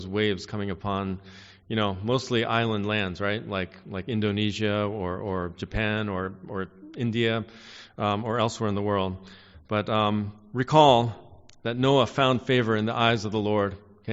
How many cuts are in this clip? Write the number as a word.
zero